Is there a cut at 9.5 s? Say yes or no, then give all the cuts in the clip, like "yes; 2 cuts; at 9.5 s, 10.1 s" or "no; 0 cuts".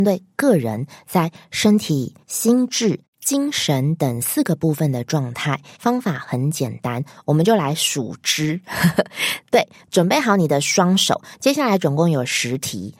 no; 2 cuts; at 2.2 s, 5.8 s